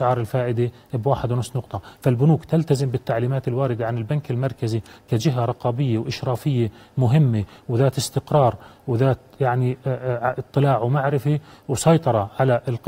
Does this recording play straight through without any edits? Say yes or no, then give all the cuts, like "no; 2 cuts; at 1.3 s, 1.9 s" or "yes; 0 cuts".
yes; 0 cuts